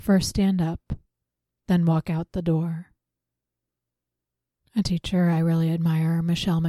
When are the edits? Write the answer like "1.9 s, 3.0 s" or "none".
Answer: none